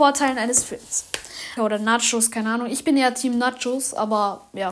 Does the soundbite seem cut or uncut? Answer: cut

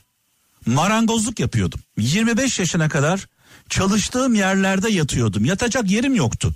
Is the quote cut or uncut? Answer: cut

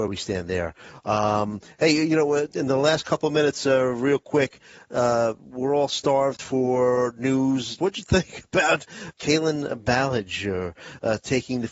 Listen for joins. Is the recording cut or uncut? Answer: cut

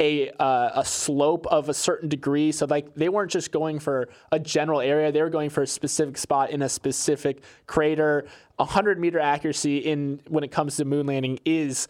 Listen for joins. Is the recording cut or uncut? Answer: uncut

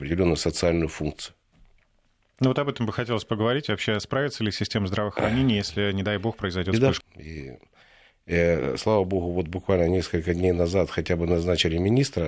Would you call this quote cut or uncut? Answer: cut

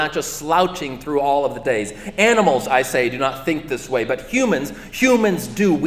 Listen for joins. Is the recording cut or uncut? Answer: uncut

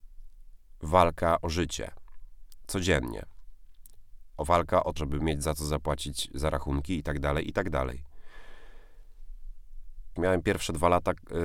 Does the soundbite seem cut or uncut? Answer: cut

